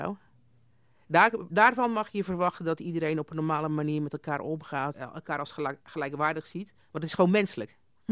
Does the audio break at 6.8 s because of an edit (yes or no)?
yes